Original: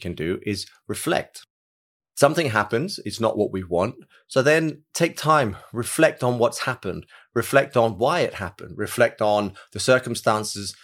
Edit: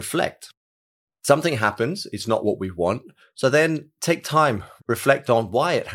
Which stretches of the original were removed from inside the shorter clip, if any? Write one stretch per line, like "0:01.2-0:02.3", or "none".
0:05.7-0:07.2